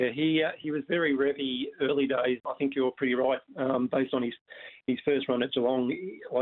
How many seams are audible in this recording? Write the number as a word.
one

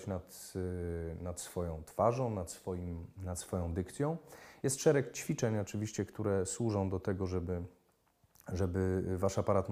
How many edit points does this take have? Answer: zero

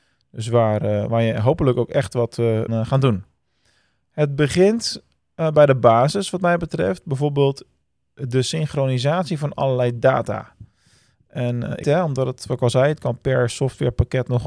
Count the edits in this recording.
two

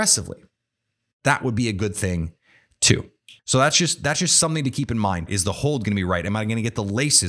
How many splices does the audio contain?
two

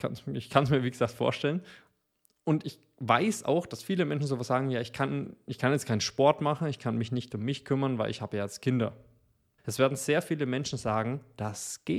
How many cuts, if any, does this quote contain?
one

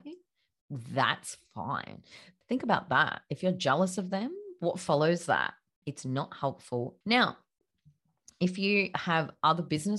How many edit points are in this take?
three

